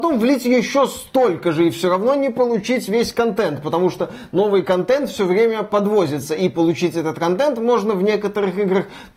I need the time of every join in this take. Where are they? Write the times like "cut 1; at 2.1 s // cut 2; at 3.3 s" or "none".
none